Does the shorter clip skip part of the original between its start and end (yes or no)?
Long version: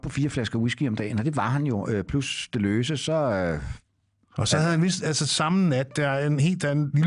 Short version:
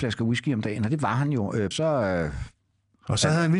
yes